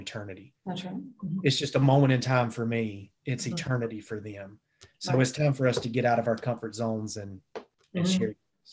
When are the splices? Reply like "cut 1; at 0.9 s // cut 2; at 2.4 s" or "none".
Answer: none